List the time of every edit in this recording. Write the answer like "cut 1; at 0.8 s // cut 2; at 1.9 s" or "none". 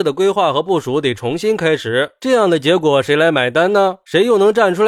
cut 1; at 2.2 s